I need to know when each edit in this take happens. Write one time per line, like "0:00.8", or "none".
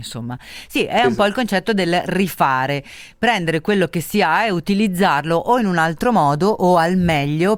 none